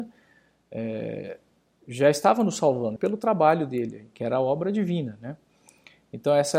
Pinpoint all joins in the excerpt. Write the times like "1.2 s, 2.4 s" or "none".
3.0 s